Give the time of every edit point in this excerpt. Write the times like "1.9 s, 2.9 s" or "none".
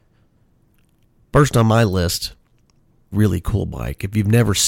3.1 s